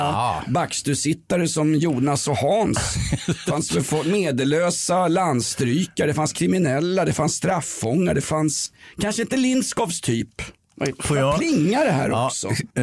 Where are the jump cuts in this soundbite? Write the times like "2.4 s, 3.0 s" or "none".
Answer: none